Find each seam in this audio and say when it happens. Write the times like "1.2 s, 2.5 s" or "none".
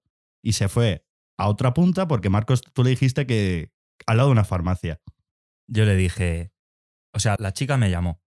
7.4 s